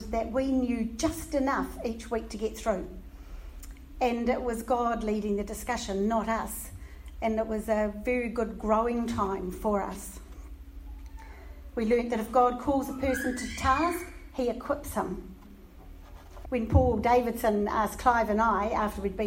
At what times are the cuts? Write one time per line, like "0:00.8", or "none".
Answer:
0:16.4

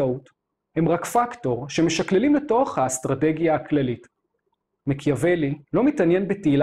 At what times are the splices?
0:05.6

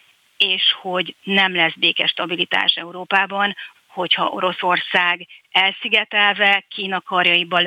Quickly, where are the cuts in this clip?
0:03.8

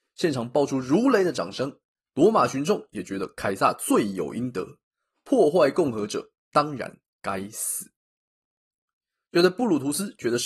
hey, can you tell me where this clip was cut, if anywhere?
none

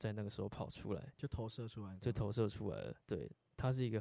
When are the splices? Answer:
0:03.0

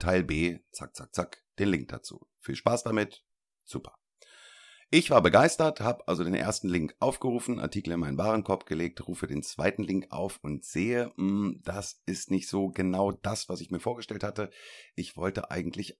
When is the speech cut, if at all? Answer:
none

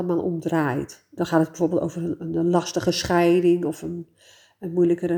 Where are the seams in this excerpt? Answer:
0:01.2

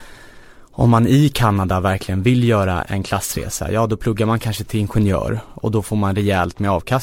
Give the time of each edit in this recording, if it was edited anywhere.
0:02.8

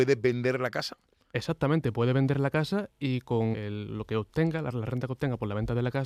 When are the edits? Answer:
0:03.5

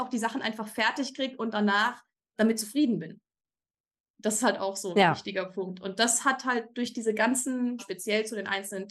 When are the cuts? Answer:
0:07.8

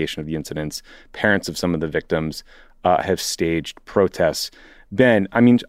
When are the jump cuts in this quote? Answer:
none

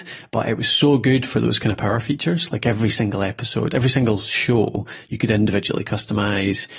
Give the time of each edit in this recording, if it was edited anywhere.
none

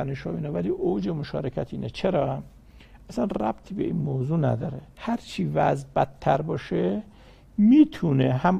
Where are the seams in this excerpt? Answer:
0:04.9

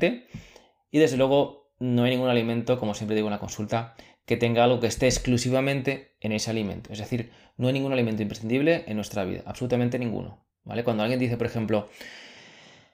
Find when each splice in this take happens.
none

